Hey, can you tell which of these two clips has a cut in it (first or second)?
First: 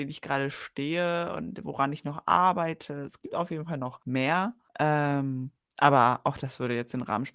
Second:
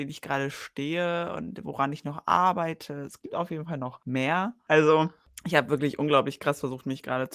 second